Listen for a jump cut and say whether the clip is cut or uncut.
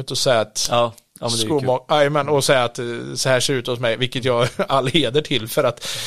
uncut